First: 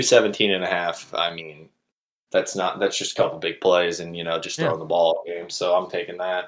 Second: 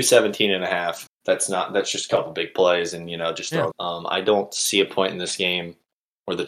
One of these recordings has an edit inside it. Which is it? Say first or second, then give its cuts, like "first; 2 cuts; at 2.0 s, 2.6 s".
second; 2 cuts; at 1.1 s, 3.7 s